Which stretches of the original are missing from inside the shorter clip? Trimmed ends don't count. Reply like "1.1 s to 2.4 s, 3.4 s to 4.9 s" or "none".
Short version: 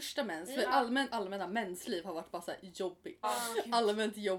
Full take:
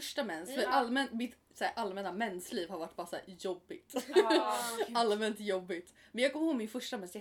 1.1 s to 1.7 s, 3.9 s to 4.5 s